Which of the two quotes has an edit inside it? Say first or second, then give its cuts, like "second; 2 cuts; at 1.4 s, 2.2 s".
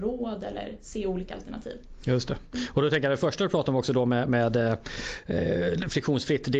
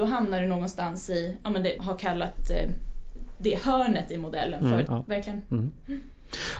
second; 2 cuts; at 1.8 s, 4.9 s